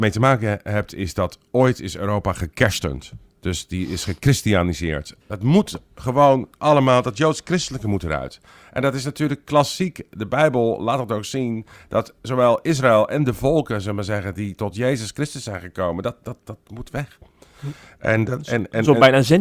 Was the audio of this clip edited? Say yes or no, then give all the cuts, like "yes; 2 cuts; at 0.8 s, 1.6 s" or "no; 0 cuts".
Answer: yes; 1 cut; at 5.2 s